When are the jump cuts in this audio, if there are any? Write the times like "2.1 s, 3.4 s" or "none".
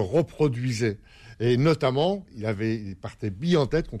none